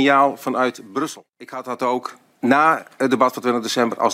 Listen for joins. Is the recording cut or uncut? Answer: uncut